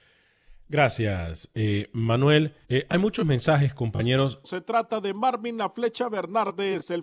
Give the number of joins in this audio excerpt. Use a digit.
2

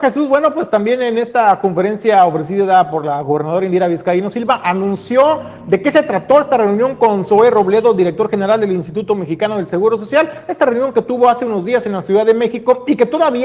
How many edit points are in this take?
0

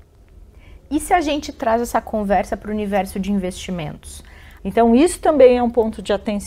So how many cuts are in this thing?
1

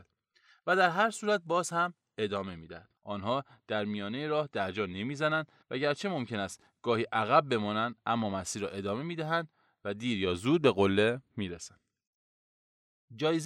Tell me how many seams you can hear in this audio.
2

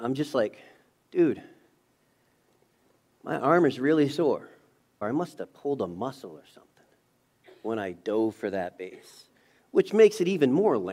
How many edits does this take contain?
1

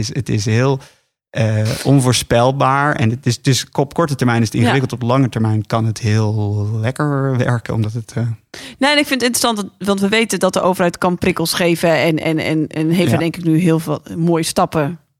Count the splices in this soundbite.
0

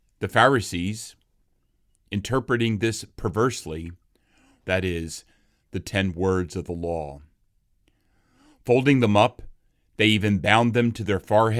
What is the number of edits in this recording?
1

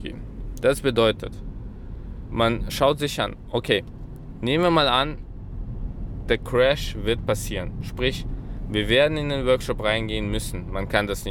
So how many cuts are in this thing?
0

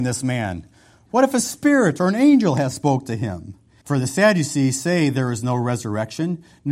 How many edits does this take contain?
1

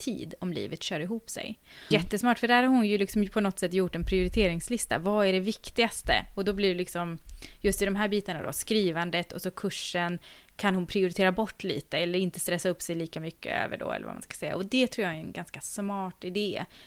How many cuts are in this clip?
1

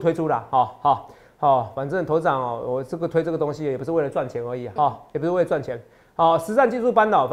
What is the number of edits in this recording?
1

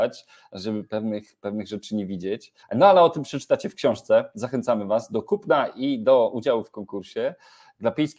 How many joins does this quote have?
1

